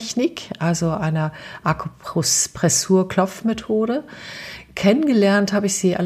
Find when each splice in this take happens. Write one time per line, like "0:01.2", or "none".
none